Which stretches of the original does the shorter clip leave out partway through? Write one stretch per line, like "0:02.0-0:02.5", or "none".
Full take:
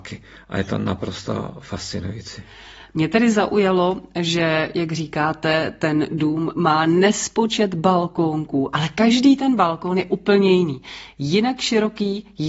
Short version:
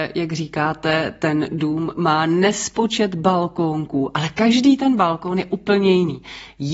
none